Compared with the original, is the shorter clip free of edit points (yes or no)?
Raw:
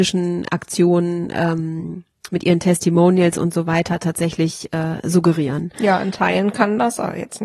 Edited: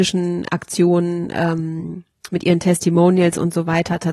yes